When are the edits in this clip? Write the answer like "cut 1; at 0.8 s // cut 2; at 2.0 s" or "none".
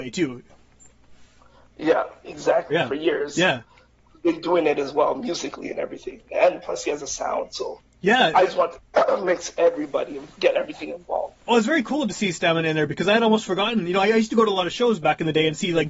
cut 1; at 2.7 s